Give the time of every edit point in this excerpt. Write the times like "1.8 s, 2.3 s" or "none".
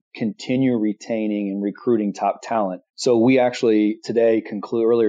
2.9 s